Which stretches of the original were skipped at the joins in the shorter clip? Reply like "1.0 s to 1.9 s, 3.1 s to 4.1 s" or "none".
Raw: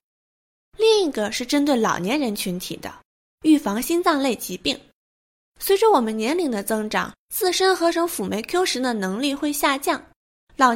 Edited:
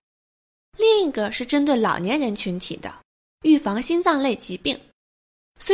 none